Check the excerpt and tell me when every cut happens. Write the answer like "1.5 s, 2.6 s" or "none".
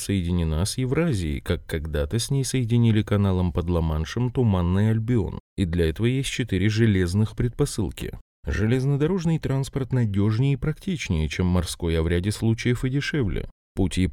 none